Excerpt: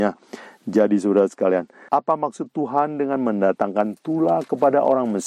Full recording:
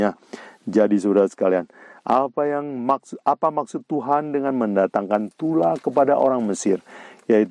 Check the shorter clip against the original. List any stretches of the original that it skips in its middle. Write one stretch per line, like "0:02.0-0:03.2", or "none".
0:01.9-0:03.2